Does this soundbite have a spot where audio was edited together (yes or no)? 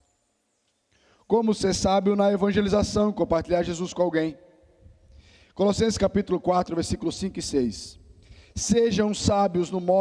no